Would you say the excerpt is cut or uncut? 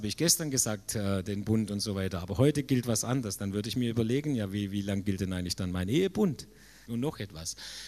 cut